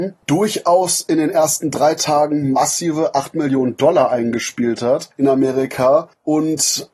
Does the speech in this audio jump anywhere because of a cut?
no; 0 cuts

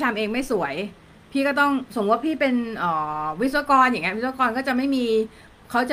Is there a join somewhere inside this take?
no; 0 cuts

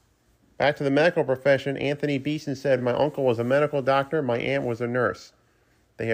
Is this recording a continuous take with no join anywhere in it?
yes; 0 cuts

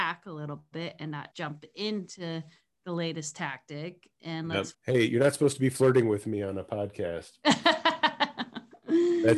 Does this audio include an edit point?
yes; 2 cuts; at 1.3 s, 4.7 s

